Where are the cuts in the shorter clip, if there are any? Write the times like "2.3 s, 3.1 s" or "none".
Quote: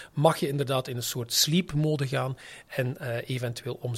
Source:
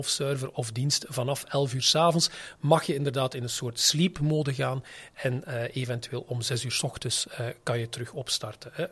none